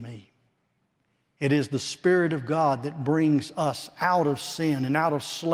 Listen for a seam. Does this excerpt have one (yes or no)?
no